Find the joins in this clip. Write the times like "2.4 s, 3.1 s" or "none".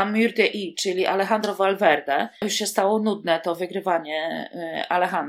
none